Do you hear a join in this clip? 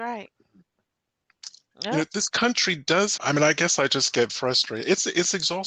yes; 3 cuts; at 1.7 s, 3.2 s, 4.3 s

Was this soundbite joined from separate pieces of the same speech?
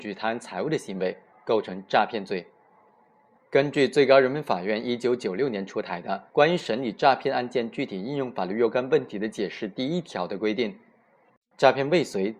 yes; 2 cuts; at 3.4 s, 6.3 s

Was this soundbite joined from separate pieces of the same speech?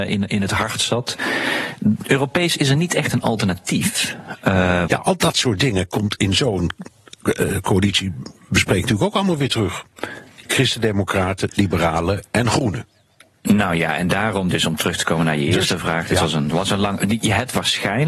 yes; 3 cuts; at 4.9 s, 10.4 s, 11.5 s

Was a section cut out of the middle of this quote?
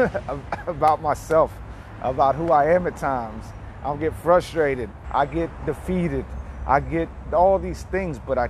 yes; 1 cut; at 5.0 s

